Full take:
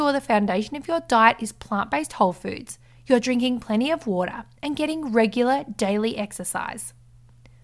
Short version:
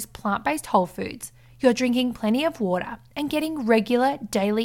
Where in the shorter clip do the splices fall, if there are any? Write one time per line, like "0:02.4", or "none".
none